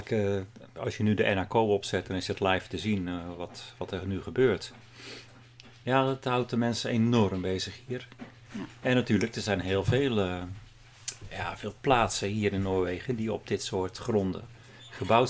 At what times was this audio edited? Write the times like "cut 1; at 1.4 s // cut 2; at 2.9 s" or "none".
none